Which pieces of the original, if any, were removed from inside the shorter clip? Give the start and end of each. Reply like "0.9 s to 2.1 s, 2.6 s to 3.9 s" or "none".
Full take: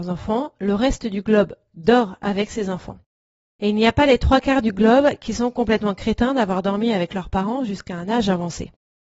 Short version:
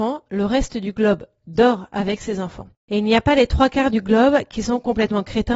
3.1 s to 3.5 s

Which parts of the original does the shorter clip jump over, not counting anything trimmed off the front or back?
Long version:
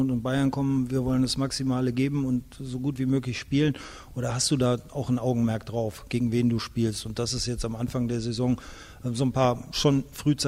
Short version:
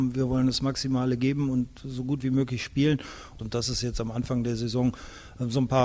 4.1 s to 7.0 s

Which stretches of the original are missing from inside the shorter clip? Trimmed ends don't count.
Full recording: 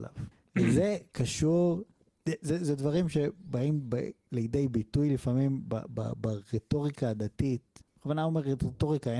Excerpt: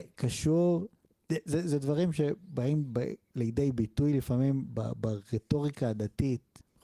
5.6 s to 5.9 s

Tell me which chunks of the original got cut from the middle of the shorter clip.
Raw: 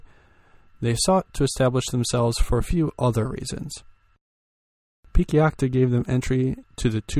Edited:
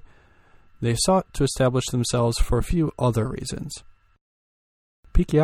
none

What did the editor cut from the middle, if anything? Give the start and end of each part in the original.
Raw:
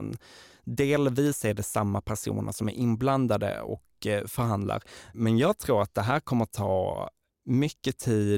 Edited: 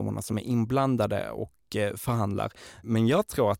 none

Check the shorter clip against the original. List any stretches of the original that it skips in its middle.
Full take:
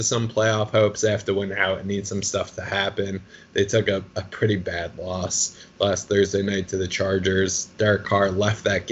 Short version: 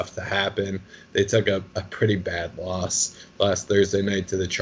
none

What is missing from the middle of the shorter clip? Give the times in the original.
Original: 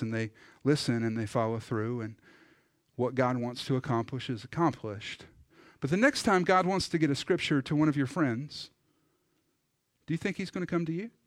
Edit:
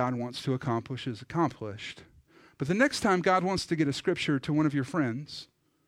none

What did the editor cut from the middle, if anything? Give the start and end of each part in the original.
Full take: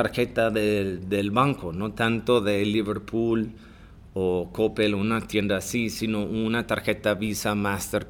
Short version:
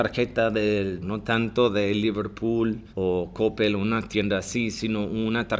1.0 s to 1.7 s, 3.6 s to 4.1 s

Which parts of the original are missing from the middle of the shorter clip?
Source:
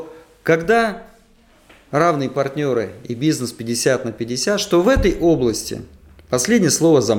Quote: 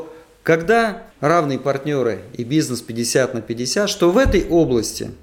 1.1 s to 1.8 s

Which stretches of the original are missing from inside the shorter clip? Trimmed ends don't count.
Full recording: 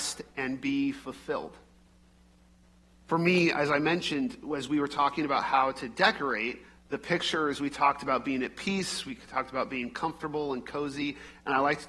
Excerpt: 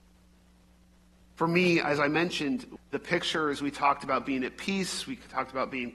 4.5 s to 6.7 s

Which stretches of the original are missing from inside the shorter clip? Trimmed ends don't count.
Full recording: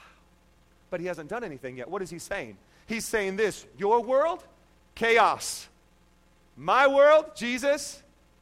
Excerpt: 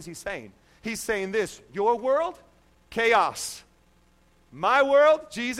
none

